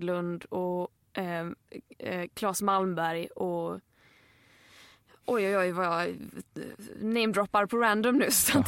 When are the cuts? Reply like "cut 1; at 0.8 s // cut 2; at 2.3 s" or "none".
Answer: none